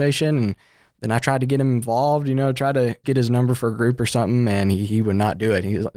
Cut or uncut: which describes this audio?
cut